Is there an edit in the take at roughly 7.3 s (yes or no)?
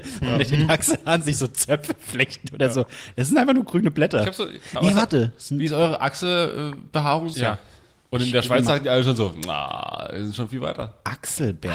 yes